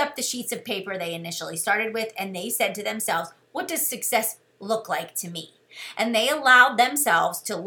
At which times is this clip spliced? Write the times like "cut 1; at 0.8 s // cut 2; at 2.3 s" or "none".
cut 1; at 4.5 s